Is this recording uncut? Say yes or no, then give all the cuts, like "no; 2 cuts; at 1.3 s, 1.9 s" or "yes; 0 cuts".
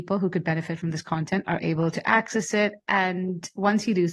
yes; 0 cuts